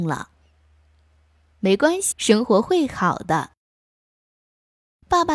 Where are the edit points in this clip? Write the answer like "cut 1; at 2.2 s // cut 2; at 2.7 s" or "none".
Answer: cut 1; at 2.1 s